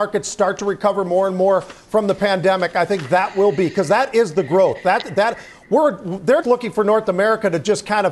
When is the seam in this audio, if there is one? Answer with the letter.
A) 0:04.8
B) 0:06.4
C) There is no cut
B